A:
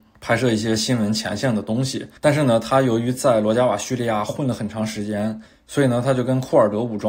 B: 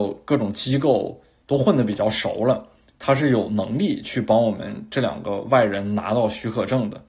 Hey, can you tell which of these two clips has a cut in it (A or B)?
A